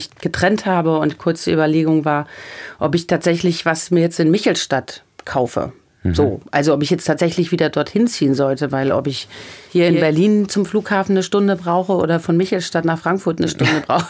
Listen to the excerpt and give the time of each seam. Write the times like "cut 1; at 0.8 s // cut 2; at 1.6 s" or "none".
none